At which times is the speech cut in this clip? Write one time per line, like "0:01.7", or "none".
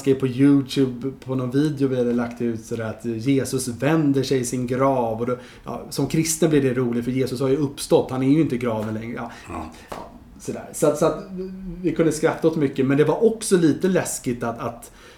none